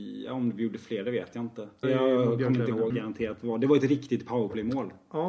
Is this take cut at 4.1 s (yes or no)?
no